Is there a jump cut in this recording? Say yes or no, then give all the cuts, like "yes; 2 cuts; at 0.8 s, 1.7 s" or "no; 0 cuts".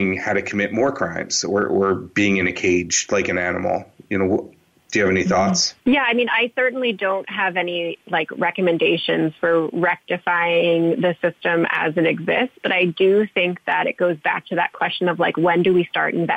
yes; 1 cut; at 5.8 s